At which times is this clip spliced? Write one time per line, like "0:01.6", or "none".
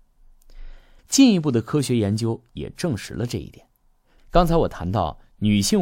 0:01.0
0:04.2